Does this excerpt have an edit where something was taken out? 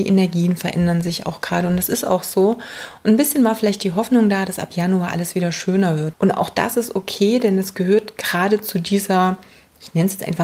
yes; 1 cut; at 6.1 s

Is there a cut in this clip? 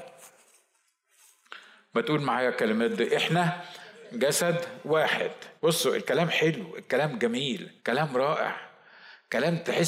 yes; 2 cuts; at 5.6 s, 7.8 s

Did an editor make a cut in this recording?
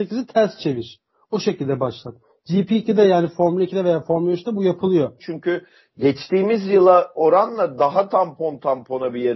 yes; 1 cut; at 5.2 s

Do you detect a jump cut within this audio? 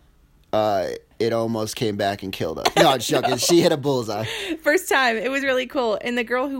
no; 0 cuts

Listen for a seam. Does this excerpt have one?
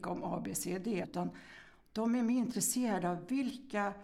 yes; 1 cut; at 1.0 s

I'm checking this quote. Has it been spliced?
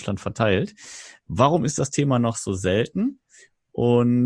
no; 0 cuts

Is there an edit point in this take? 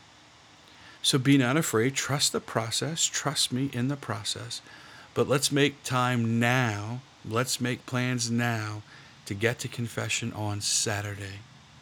yes; 1 cut; at 1.0 s

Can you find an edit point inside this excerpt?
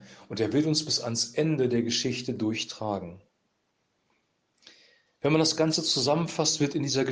no; 0 cuts

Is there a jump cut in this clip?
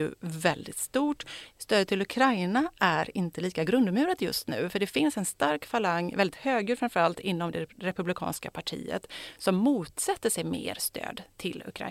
no; 0 cuts

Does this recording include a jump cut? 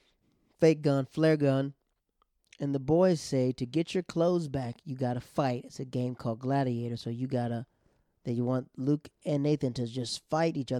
no; 0 cuts

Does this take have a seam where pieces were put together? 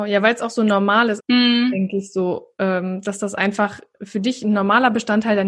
yes; 1 cut; at 1.2 s

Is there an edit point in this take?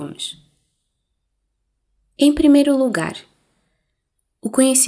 no; 0 cuts

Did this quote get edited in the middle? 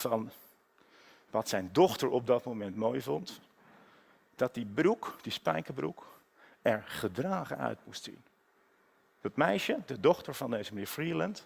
no; 0 cuts

